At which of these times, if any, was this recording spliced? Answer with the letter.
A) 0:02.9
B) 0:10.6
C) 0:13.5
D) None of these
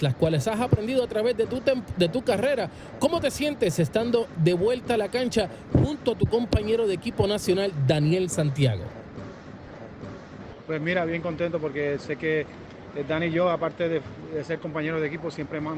D